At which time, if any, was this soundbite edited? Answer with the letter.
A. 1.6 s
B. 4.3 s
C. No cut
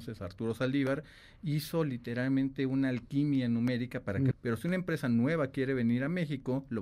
B